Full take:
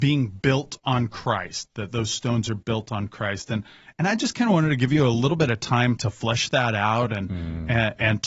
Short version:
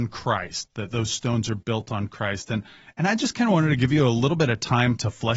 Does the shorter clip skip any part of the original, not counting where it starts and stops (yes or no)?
no